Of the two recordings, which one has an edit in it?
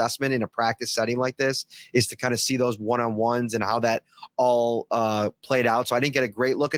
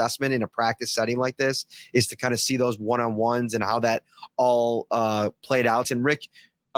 second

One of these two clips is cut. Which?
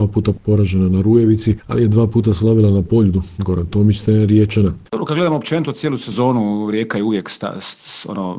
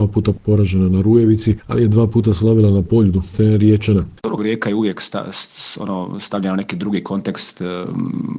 second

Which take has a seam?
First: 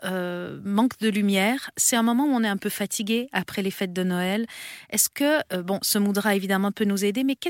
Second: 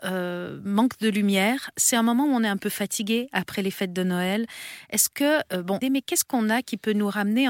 second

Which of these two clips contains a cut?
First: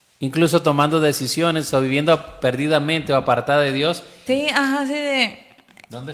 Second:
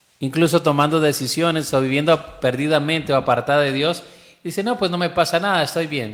first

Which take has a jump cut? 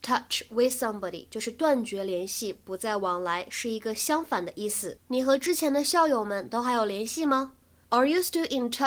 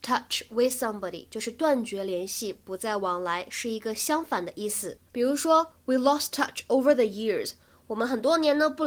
first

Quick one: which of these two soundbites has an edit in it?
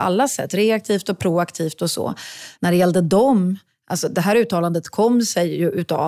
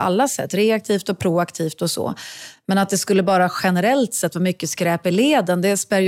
first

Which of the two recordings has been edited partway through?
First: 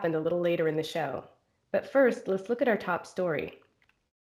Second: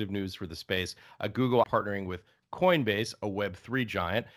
second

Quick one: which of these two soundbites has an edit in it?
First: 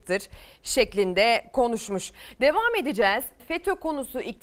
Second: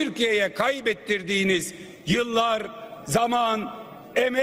first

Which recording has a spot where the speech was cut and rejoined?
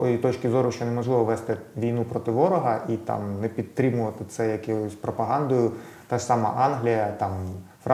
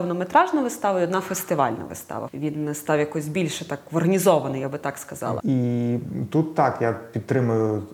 second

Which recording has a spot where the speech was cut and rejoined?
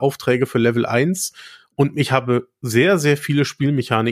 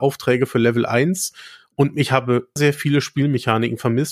second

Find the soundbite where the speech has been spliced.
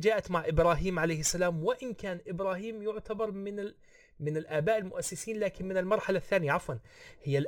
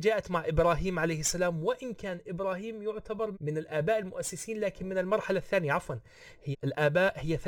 second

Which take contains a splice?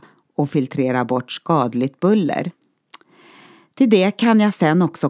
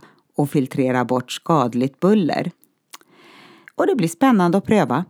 second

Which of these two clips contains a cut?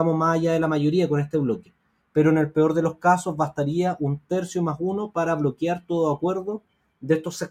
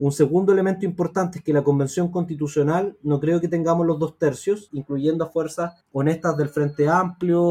second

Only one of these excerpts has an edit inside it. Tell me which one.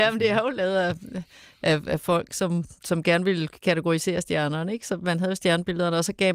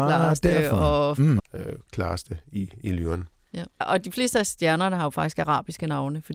second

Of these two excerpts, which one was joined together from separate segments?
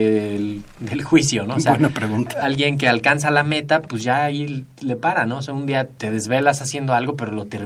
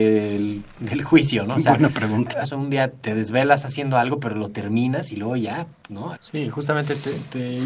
second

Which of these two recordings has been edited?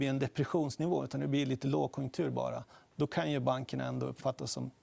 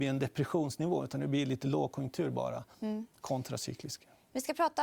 second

